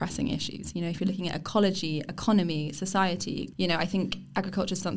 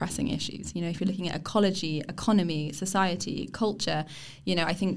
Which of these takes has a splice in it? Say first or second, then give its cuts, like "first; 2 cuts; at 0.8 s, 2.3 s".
first; 1 cut; at 3.5 s